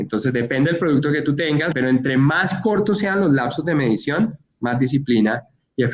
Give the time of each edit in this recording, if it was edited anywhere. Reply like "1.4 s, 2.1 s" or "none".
1.7 s